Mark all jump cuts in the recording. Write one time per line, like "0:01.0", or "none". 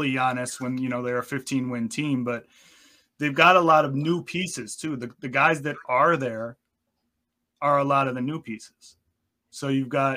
none